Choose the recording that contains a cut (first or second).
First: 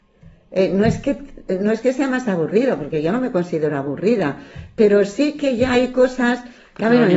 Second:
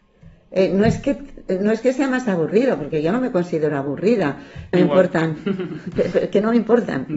second